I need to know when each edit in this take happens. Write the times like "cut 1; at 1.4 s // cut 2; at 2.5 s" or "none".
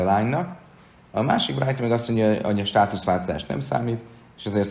none